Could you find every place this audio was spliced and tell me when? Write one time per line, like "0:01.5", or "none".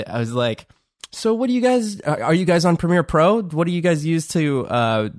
none